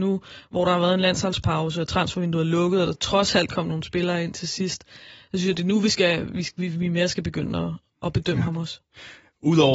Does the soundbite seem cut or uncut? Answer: uncut